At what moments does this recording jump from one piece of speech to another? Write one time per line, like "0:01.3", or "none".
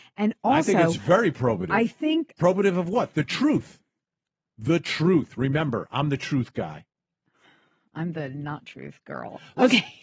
none